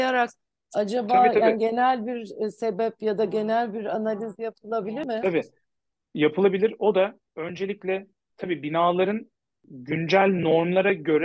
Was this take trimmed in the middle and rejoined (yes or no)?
no